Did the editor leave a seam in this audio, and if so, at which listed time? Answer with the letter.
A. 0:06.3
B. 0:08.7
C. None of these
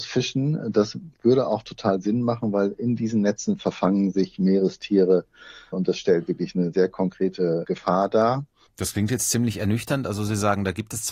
B